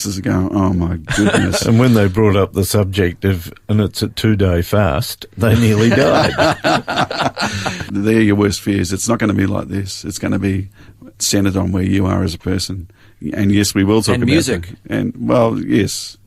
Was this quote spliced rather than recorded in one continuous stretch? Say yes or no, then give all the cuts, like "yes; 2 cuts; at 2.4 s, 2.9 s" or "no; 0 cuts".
yes; 1 cut; at 7.9 s